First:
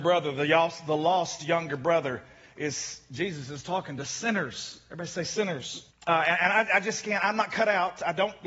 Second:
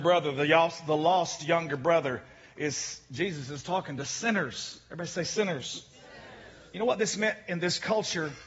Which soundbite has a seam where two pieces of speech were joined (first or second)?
first